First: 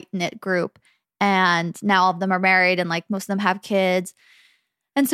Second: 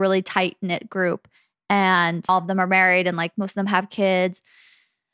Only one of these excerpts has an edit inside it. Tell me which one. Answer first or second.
second